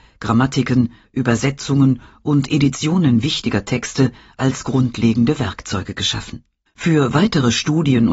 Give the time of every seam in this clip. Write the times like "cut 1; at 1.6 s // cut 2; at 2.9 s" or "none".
cut 1; at 1.0 s // cut 2; at 6.7 s